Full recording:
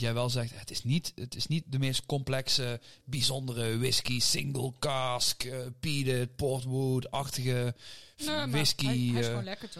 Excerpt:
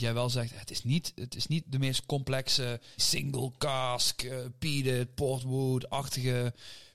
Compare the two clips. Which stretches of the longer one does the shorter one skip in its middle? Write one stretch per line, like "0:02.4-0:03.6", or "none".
0:03.0-0:04.2